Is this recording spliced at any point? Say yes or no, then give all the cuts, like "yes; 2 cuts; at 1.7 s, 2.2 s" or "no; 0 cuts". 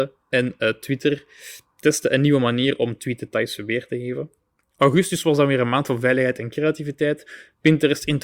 no; 0 cuts